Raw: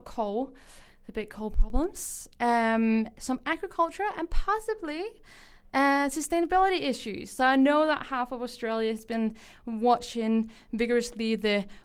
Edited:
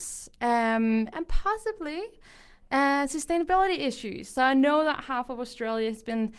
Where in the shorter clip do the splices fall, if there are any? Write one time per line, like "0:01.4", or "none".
0:01.1

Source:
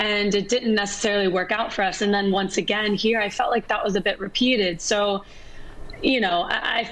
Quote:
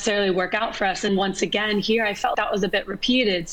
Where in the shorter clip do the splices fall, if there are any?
0:01.1
0:02.3

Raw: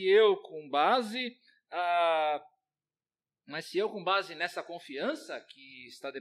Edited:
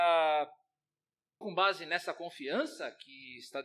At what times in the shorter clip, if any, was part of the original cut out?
0:01.4

